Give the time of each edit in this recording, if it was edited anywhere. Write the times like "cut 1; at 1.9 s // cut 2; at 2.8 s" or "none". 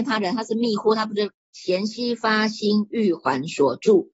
cut 1; at 1.5 s

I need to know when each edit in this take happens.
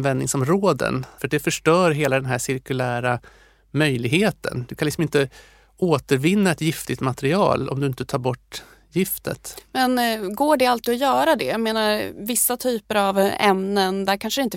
cut 1; at 1.2 s

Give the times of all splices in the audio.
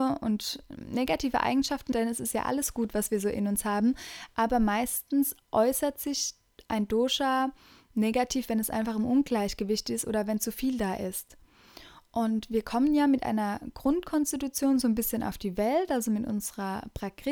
cut 1; at 1.9 s

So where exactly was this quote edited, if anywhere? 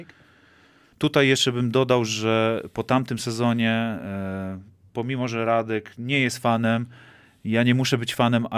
cut 1; at 0.9 s

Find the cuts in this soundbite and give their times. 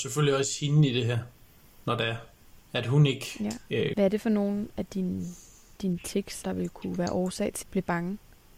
cut 1; at 2.6 s // cut 2; at 3.9 s // cut 3; at 7.6 s

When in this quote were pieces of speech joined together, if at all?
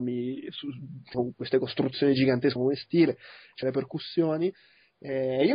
cut 1; at 1.1 s // cut 2; at 2.6 s // cut 3; at 3.6 s

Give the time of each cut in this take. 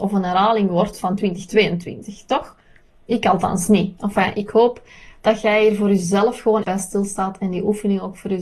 cut 1; at 4.0 s // cut 2; at 6.6 s

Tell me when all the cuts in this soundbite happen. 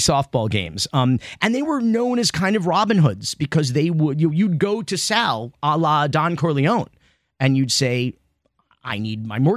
none

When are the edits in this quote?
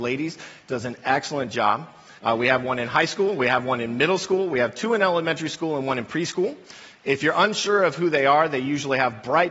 cut 1; at 2.2 s

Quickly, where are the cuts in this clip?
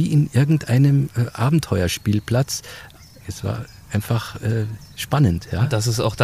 cut 1; at 3.2 s // cut 2; at 4.9 s

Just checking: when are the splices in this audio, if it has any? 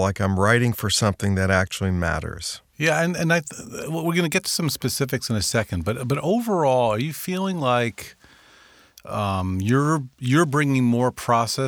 cut 1; at 2.7 s

